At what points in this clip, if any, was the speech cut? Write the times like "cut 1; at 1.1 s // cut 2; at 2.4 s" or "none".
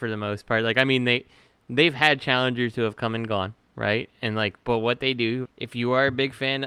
cut 1; at 5.5 s